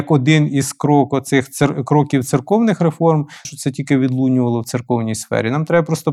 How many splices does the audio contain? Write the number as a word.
one